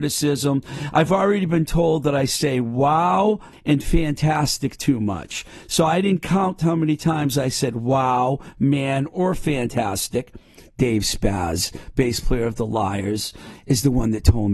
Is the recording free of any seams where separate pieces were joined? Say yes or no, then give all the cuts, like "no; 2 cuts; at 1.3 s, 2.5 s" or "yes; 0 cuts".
no; 1 cut; at 3.5 s